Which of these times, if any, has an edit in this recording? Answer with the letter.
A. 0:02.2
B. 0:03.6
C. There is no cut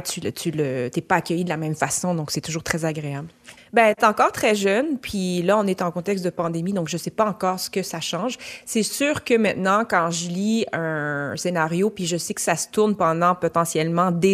B